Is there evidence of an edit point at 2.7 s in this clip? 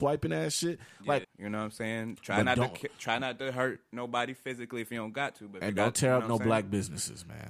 no; 1 cut; at 1.2 s

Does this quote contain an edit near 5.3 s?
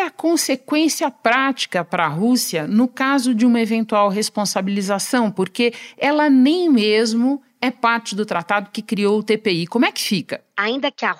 no; 0 cuts

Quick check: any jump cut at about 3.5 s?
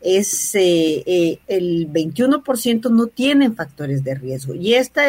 no; 1 cut; at 1.4 s

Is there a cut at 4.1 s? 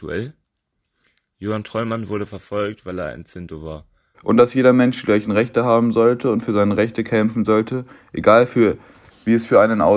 yes; 1 cut; at 4.1 s

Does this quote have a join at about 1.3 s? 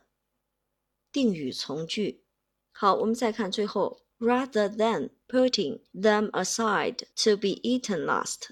no; 2 cuts; at 2.6 s, 7.1 s

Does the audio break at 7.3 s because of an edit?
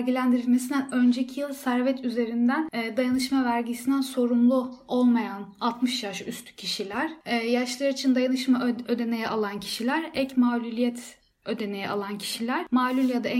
no; 0 cuts

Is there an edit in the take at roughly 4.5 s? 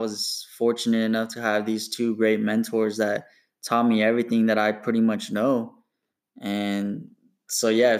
no; 1 cut; at 6.2 s

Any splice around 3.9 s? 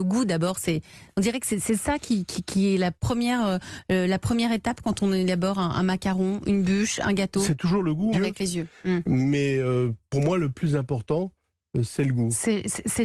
no; 1 cut; at 8.1 s

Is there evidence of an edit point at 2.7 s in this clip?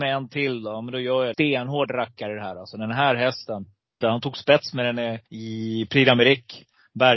no; 3 cuts; at 1.3 s, 4.0 s, 5.3 s

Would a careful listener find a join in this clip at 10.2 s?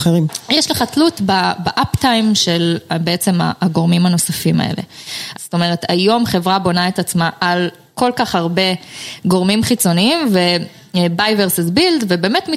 no; 1 cut; at 5.3 s

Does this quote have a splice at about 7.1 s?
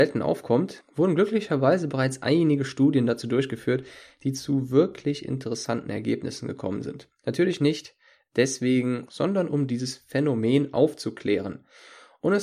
no; 1 cut; at 9.1 s

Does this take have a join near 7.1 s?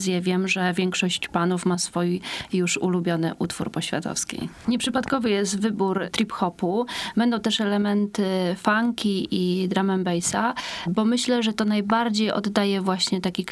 no; 0 cuts

